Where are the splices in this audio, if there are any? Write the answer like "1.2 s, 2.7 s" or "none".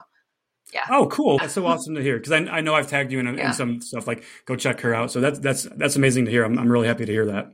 1.4 s